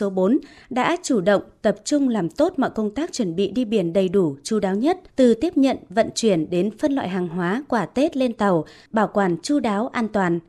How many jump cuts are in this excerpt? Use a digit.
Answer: 1